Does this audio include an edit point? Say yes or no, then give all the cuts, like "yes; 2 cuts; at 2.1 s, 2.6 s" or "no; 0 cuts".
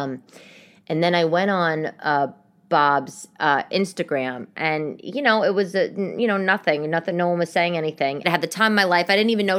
yes; 1 cut; at 8.2 s